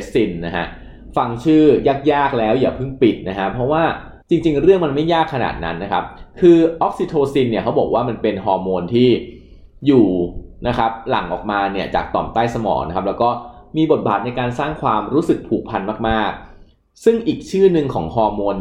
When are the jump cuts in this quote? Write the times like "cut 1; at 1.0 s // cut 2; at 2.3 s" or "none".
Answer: cut 1; at 4.2 s